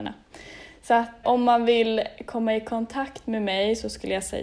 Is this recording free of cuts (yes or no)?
no